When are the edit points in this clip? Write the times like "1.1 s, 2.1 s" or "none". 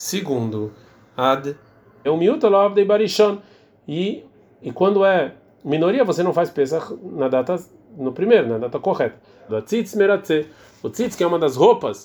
2.0 s, 9.5 s